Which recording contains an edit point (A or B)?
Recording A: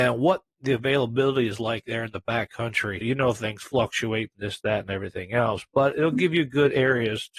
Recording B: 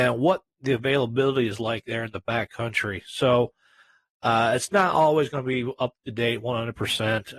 A